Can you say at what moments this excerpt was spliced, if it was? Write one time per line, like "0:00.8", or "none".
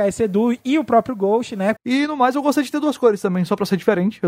0:01.8